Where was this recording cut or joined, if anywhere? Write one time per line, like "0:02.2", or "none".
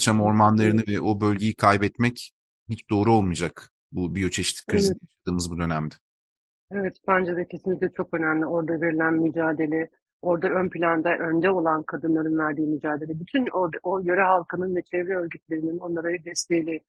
none